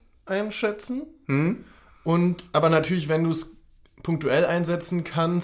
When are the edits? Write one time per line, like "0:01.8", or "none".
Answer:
none